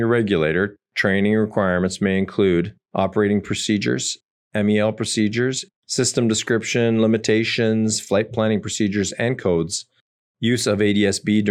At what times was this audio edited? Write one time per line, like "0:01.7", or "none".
0:05.7